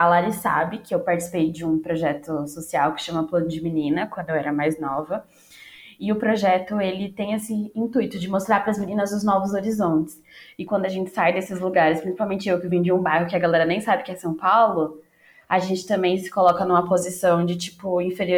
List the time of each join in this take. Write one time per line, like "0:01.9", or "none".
0:10.5